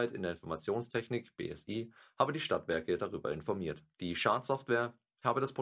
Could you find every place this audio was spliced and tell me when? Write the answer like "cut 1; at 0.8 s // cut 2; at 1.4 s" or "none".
cut 1; at 3.9 s